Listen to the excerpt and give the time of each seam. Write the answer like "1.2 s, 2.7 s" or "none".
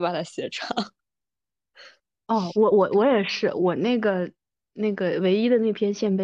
none